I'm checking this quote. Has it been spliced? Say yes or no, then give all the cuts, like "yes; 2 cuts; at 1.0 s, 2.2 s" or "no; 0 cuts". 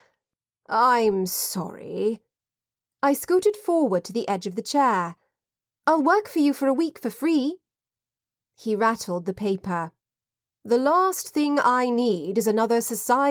no; 0 cuts